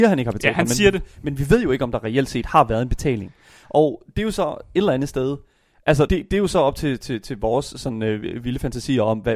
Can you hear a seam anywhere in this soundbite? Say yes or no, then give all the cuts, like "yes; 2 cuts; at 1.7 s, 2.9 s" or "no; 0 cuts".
yes; 1 cut; at 6.1 s